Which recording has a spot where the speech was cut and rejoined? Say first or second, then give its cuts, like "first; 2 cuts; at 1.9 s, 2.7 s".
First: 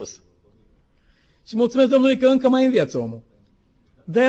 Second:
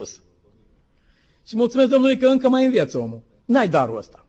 second; 1 cut; at 3.4 s